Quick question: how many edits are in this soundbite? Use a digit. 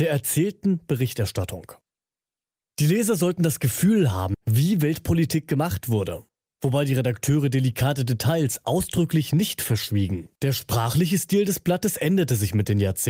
2